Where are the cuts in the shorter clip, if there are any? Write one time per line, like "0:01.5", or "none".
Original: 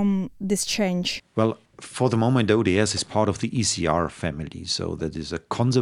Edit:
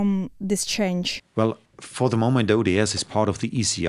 none